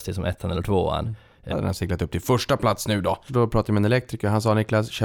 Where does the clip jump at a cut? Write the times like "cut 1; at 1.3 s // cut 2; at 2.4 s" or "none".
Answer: cut 1; at 1.5 s // cut 2; at 3.3 s